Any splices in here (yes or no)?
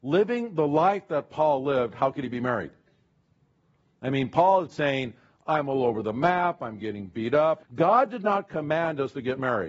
yes